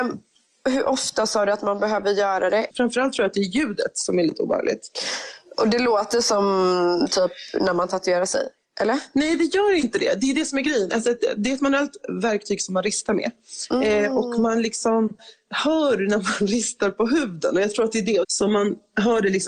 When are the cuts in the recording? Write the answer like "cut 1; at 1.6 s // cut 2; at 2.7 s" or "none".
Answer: cut 1; at 2.7 s // cut 2; at 18.2 s